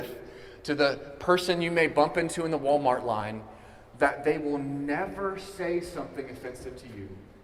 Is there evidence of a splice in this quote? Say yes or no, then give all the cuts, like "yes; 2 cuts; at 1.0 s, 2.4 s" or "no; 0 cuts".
no; 0 cuts